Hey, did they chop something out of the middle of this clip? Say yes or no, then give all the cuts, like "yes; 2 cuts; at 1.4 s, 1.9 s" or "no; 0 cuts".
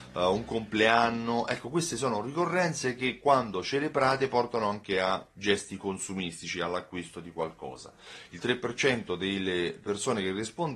no; 0 cuts